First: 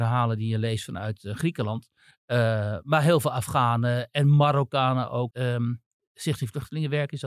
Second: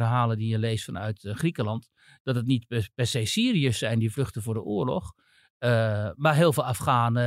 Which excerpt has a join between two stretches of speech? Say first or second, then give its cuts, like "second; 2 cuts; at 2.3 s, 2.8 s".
first; 2 cuts; at 2.1 s, 5.3 s